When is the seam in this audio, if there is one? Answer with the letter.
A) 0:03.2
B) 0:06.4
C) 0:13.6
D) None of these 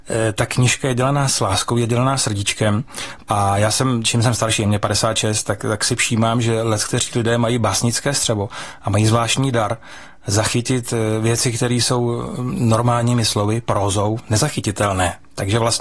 A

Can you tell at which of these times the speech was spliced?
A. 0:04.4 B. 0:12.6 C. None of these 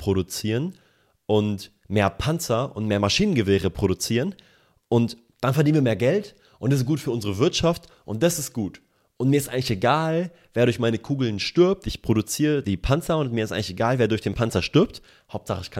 B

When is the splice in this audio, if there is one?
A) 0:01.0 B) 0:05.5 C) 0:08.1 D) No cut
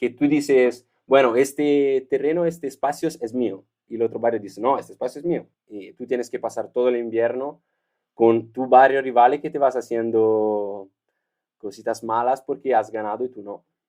B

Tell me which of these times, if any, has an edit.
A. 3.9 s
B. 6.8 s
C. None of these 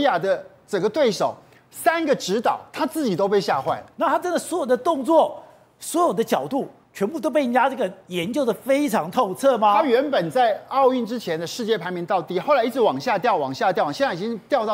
A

